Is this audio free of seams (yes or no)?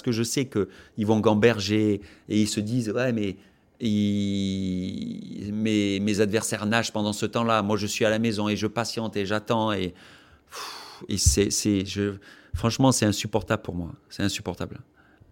yes